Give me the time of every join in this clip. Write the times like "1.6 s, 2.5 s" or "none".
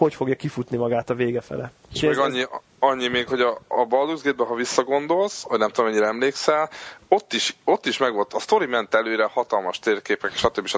1.9 s